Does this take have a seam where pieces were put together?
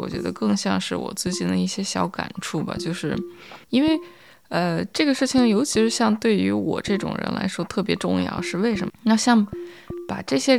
yes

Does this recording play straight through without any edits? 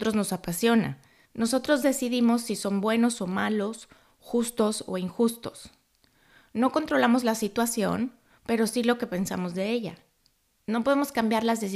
no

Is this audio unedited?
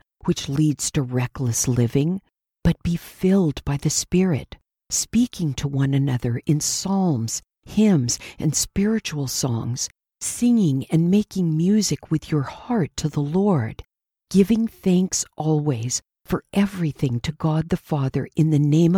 yes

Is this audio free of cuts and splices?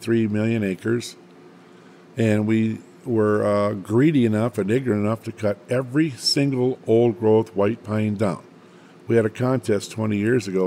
yes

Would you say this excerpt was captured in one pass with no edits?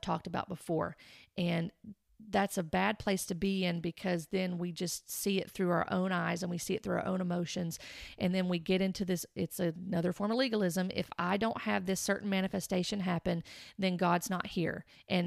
yes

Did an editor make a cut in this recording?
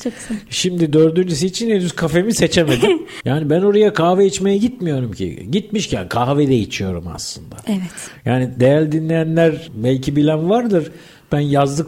yes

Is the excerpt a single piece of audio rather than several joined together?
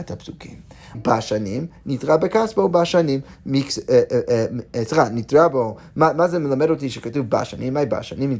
no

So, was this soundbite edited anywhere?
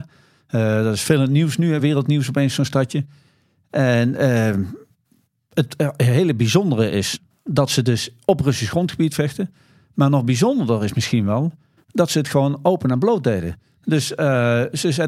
no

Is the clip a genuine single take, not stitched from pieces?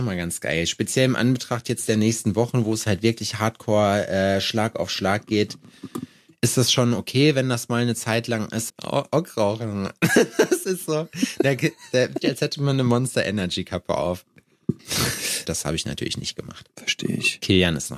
no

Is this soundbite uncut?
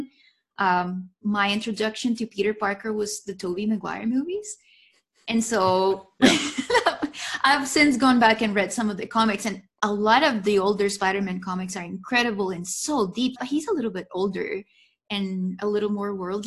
no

